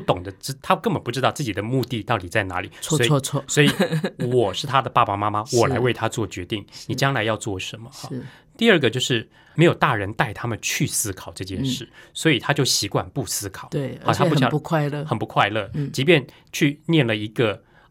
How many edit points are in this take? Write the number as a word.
one